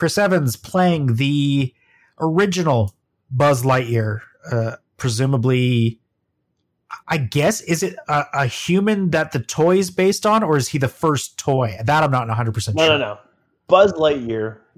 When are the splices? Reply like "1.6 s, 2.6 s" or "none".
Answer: 7.0 s